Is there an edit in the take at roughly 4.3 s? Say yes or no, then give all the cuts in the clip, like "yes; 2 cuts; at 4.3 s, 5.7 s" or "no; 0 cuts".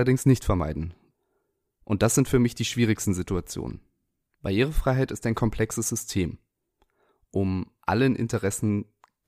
yes; 1 cut; at 4.3 s